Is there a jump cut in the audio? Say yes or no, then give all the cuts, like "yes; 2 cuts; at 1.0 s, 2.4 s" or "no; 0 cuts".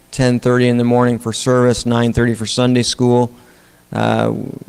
no; 0 cuts